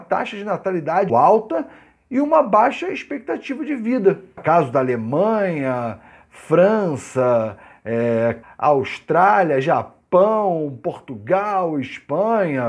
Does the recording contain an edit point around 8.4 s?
yes; 3 cuts; at 1.1 s, 4.4 s, 8.4 s

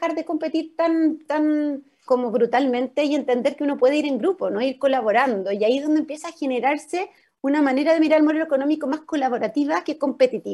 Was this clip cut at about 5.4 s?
no; 1 cut; at 2.1 s

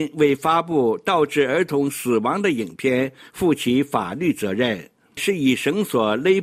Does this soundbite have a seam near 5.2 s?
yes; 1 cut; at 5.2 s

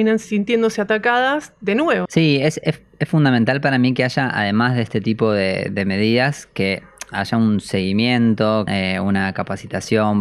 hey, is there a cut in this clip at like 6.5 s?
no; 2 cuts; at 2.1 s, 8.7 s

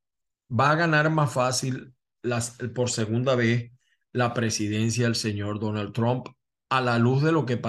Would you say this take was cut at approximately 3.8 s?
no; 0 cuts

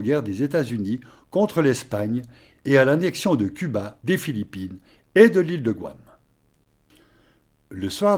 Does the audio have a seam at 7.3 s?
no; 1 cut; at 4.0 s

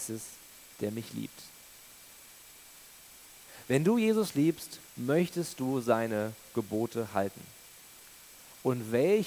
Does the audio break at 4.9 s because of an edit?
yes; 1 cut; at 4.9 s

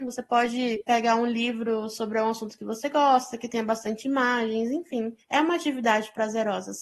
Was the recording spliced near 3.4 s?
no; 1 cut; at 5.2 s

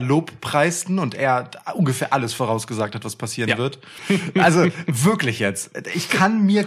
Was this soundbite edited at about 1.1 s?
no; 1 cut; at 4.0 s

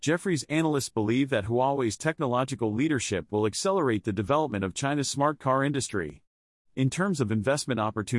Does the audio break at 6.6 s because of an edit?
no; 0 cuts

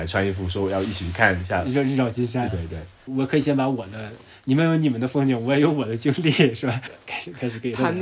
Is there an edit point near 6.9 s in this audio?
yes; 2 cuts; at 2.5 s, 6.9 s

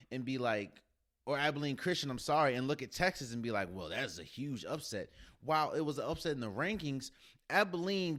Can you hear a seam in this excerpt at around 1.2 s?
no; 0 cuts

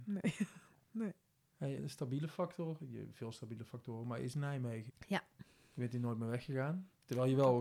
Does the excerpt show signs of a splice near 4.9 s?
yes; 2 cuts; at 1.8 s, 4.9 s

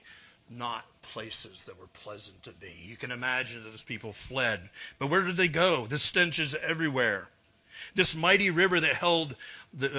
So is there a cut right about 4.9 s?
no; 0 cuts

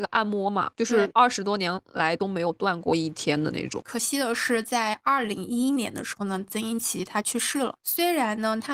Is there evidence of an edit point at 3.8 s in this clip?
no; 0 cuts

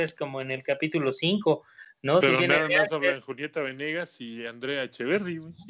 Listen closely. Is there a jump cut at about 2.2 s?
yes; 1 cut; at 2.2 s

